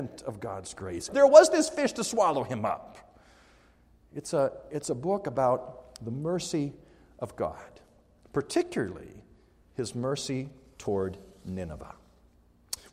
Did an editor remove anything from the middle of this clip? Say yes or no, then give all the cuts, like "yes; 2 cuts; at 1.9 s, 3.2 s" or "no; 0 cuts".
yes; 1 cut; at 1.1 s